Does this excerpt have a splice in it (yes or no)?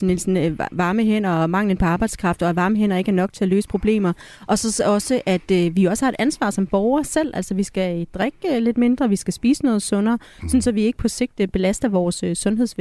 no